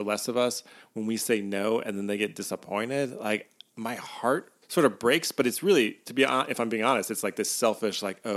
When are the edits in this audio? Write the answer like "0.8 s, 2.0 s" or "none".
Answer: 4.6 s